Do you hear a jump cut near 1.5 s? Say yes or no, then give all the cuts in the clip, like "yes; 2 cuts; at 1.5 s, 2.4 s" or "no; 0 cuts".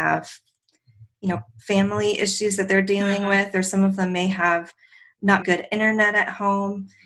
no; 1 cut; at 5.4 s